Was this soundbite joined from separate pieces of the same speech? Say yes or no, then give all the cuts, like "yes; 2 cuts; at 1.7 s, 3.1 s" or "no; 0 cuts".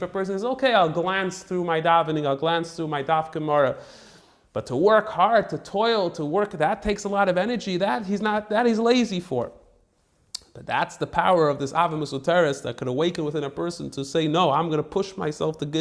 no; 0 cuts